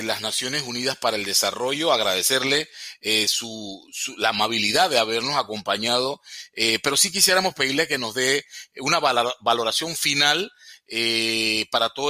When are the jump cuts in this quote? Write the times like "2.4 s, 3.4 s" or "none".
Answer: none